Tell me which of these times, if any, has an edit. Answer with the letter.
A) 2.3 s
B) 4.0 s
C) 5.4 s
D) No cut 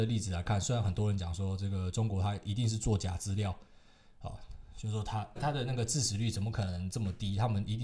C